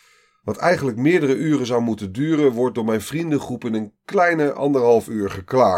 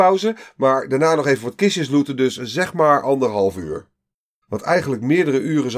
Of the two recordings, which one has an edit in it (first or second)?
second